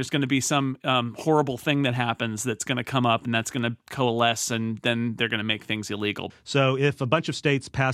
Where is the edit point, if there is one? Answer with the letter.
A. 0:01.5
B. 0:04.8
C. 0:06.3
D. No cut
C